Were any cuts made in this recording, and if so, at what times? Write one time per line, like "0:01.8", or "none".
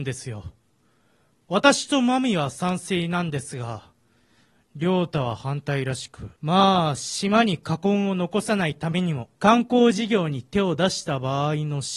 0:06.4
0:09.3